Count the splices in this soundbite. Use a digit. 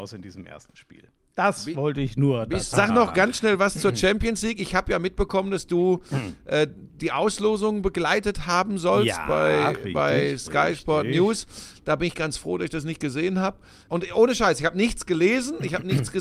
2